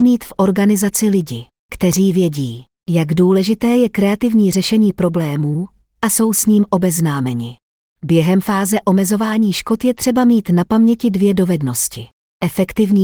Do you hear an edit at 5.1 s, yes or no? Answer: no